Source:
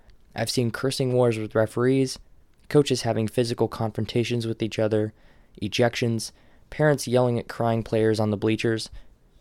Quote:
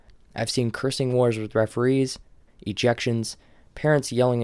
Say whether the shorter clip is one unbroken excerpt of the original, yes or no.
no